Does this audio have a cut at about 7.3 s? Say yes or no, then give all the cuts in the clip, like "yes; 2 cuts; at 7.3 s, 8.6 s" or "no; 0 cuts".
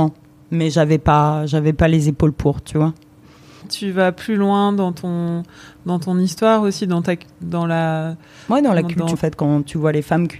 no; 2 cuts; at 3.6 s, 9.1 s